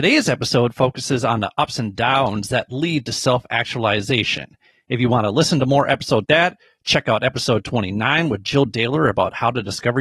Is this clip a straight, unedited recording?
no; 1 cut; at 6.2 s

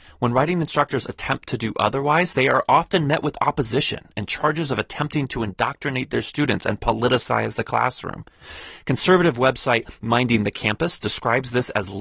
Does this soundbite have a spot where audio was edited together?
no; 0 cuts

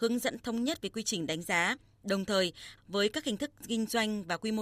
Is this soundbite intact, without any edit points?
no; 1 cut; at 2.8 s

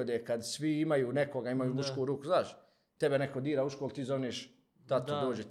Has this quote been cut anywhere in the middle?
no; 0 cuts

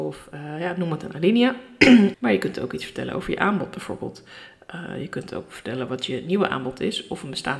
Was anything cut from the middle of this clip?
yes; 1 cut; at 2.1 s

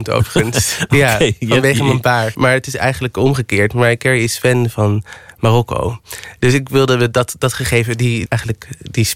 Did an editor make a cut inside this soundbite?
yes; 2 cuts; at 2.3 s, 8.3 s

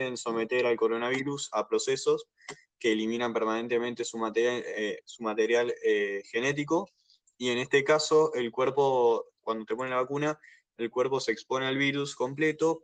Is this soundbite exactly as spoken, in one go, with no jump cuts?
yes; 0 cuts

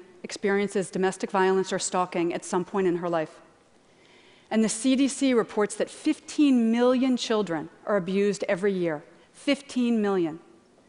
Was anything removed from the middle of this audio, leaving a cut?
no; 0 cuts

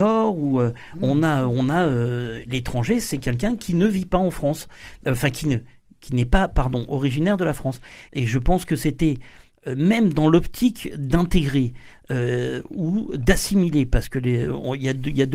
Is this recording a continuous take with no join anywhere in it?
no; 1 cut; at 8.1 s

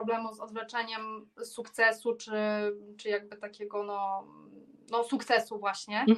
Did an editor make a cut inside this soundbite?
no; 0 cuts

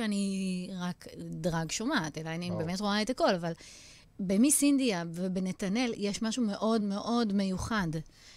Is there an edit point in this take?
yes; 2 cuts; at 4.0 s, 6.8 s

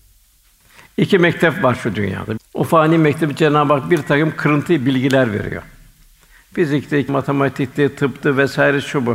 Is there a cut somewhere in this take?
yes; 2 cuts; at 2.4 s, 7.1 s

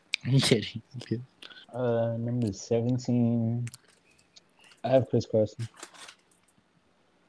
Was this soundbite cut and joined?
yes; 1 cut; at 1.6 s

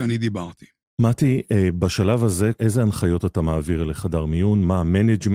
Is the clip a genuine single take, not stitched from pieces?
no; 1 cut; at 2.5 s

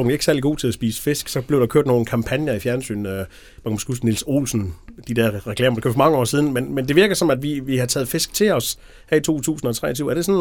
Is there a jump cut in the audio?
no; 0 cuts

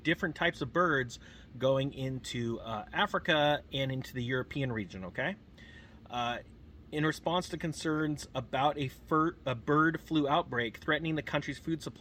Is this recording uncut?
yes; 0 cuts

